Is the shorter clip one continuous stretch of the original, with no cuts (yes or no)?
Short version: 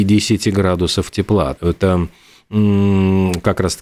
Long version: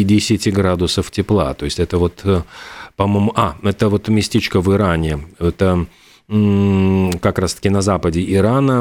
no